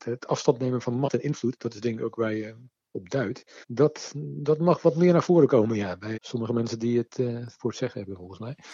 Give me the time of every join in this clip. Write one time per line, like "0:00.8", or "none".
0:03.6
0:06.1